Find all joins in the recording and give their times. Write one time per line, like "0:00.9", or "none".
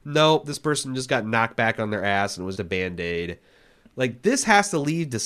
0:02.6